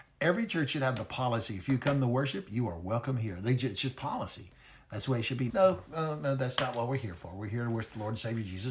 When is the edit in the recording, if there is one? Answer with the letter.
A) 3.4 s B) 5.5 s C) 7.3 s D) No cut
B